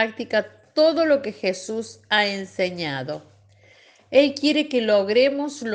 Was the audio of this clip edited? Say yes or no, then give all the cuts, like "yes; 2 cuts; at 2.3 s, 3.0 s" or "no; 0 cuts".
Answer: no; 0 cuts